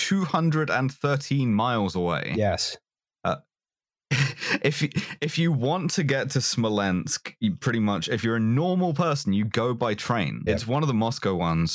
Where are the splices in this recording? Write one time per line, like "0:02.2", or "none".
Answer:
0:10.5